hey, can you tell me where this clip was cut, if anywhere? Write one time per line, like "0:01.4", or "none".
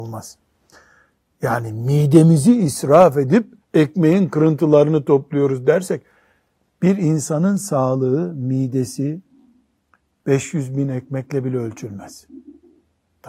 0:03.6